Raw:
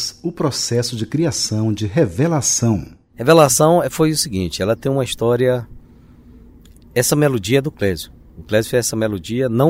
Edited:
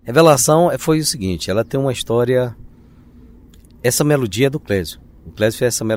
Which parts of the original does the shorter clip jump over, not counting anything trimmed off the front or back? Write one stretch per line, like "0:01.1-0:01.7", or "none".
none